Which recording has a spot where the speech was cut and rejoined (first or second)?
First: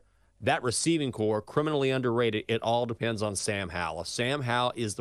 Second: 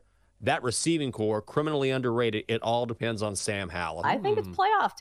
second